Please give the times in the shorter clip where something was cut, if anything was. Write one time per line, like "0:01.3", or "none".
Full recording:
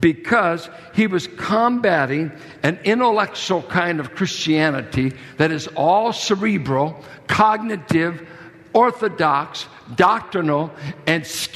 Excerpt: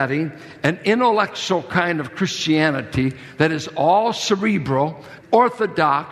0:05.2